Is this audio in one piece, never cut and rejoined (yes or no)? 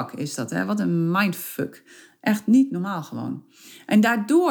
yes